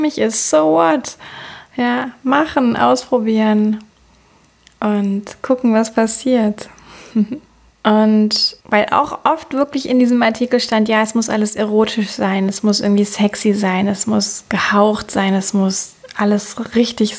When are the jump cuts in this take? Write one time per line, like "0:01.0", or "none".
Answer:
none